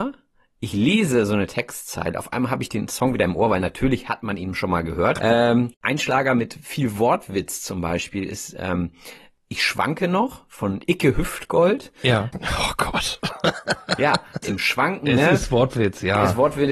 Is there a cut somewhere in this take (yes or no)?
yes